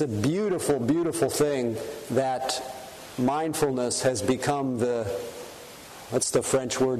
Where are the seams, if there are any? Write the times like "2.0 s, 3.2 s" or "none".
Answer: none